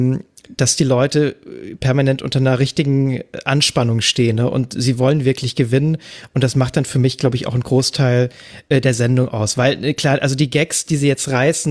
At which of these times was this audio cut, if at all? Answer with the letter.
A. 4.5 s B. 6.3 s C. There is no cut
C